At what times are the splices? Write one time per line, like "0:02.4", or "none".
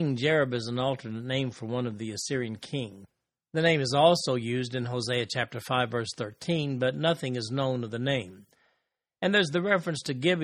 none